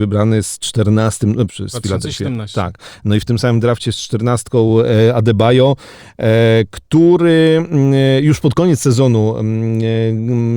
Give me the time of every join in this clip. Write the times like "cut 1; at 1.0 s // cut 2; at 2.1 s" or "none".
cut 1; at 1.5 s